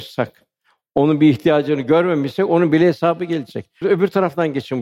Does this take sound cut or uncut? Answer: cut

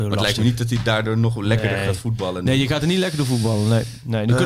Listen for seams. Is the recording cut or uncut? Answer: uncut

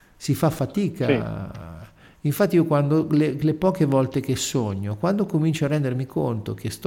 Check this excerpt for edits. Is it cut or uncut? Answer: uncut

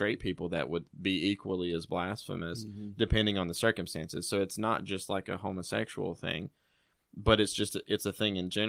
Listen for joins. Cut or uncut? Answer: uncut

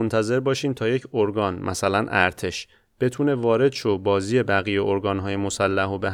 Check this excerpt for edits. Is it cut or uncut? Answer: uncut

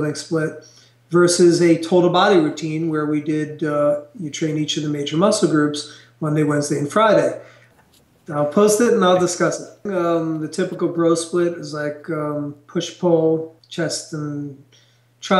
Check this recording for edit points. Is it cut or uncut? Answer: cut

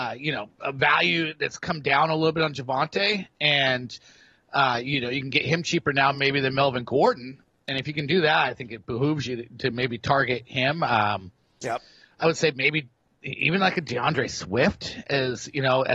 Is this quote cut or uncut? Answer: uncut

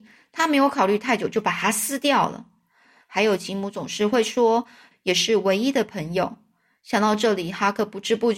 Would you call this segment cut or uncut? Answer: cut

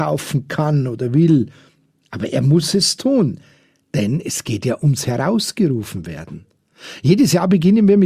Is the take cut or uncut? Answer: uncut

